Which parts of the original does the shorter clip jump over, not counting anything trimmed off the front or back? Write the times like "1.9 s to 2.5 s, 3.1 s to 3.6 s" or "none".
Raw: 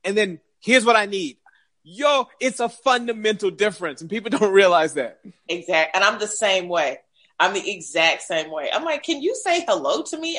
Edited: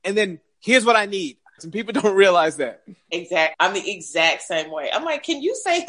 1.6 s to 4.0 s, 5.9 s to 7.3 s